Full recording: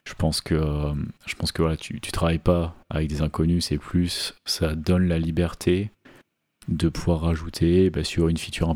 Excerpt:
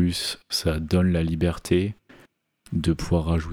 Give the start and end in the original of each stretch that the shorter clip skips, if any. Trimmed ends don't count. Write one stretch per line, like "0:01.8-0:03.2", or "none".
none